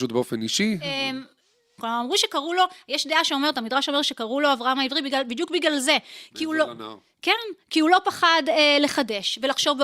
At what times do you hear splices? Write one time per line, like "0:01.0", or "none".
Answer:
0:01.8